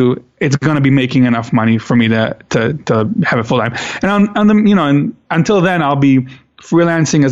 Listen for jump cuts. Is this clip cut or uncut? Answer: uncut